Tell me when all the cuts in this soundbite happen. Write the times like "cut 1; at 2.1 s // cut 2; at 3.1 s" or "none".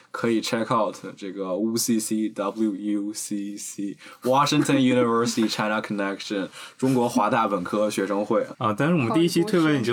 cut 1; at 8.5 s